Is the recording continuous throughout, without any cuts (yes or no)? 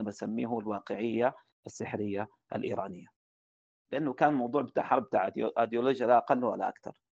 no